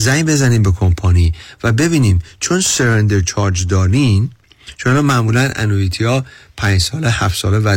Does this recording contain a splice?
no; 0 cuts

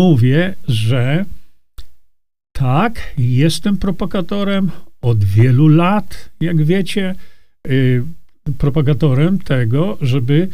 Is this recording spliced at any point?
no; 0 cuts

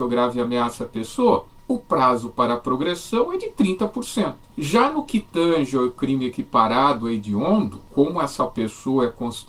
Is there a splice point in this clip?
no; 0 cuts

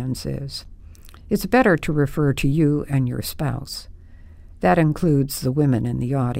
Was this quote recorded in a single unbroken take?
yes; 0 cuts

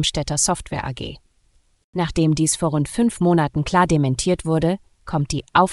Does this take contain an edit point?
yes; 1 cut; at 1.8 s

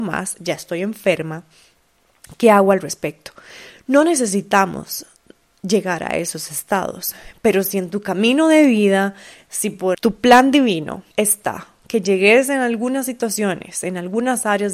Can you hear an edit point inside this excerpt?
yes; 2 cuts; at 9.9 s, 11.1 s

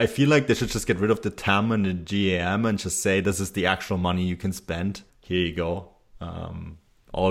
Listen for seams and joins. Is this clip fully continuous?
no; 1 cut; at 5.1 s

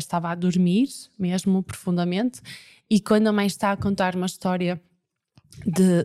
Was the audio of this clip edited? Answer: no; 0 cuts

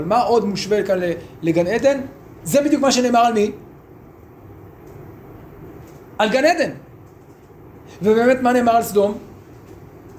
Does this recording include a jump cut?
yes; 1 cut; at 2.4 s

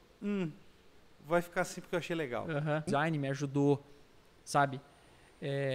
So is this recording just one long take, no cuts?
no; 1 cut; at 2.9 s

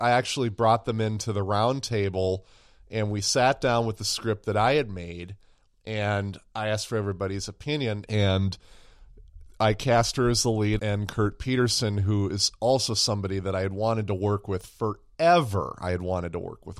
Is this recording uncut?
no; 2 cuts; at 8.1 s, 10.8 s

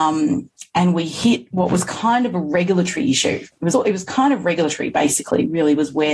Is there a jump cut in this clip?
yes; 1 cut; at 3.7 s

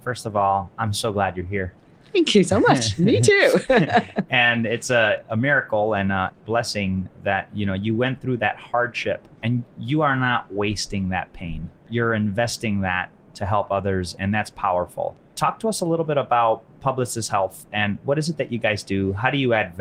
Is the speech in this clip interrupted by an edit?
no; 0 cuts

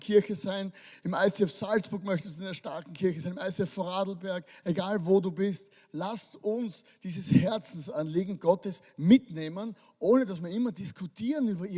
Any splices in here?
no; 0 cuts

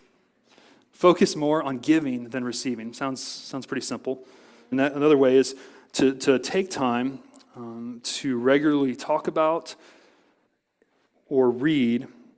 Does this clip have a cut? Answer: yes; 1 cut; at 4.7 s

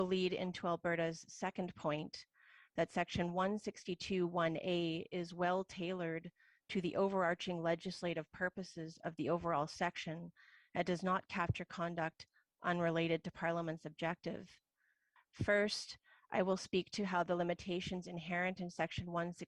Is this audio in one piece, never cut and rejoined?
no; 1 cut; at 15.2 s

